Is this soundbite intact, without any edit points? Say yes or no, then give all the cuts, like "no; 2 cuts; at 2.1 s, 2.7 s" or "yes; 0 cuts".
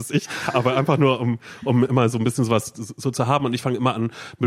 yes; 0 cuts